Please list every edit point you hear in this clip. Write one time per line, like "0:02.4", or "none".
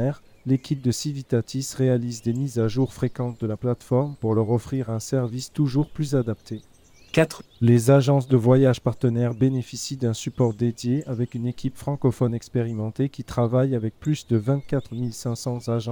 0:07.5

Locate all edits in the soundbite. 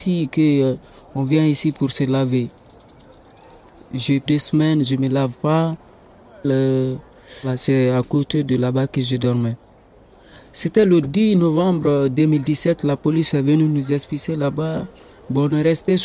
0:04.3
0:06.4

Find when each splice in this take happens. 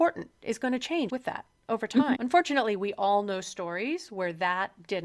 0:01.1
0:02.1

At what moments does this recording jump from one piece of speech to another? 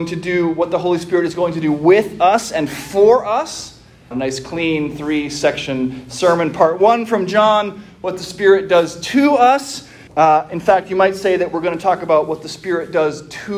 0:04.1
0:10.1

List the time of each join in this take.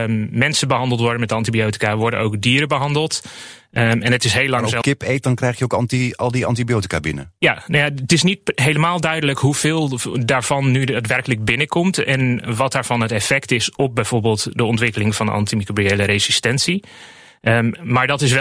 0:04.8

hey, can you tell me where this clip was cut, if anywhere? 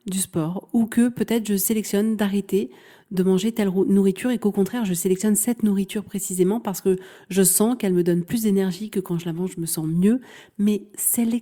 none

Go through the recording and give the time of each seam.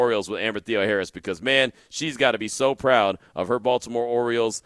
none

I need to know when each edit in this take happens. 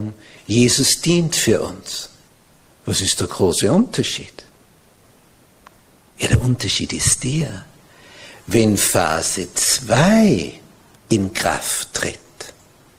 none

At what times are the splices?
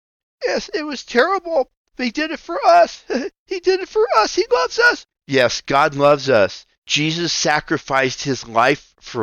0:05.1
0:06.7

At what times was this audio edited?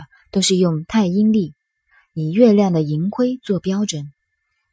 none

